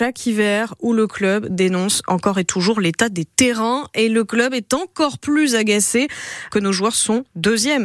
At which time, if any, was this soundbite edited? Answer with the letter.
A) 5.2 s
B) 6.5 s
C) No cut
B